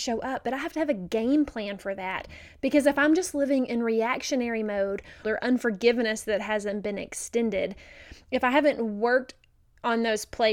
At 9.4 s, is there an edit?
no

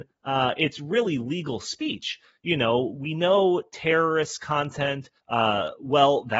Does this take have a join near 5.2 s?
yes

